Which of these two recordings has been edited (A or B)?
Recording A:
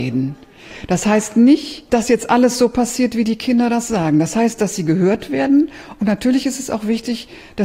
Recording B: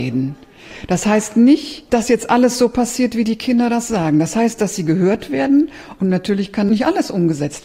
B